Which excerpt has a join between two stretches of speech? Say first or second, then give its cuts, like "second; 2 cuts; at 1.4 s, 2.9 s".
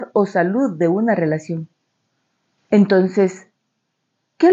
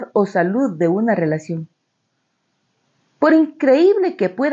first; 1 cut; at 2.6 s